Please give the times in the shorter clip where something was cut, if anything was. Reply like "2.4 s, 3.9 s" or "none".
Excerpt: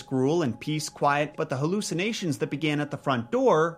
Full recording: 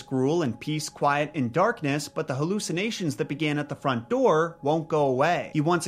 1.3 s